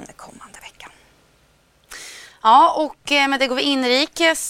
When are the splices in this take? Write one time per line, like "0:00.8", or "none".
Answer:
none